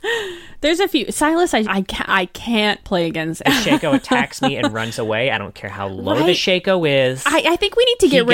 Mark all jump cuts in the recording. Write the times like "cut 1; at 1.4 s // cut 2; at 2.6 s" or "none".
cut 1; at 1.6 s // cut 2; at 3.4 s